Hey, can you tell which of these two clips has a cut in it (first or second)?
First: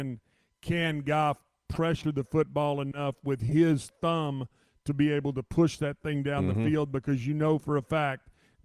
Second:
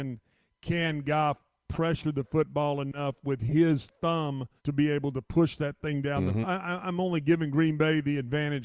second